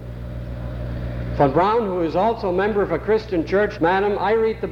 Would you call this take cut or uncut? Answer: cut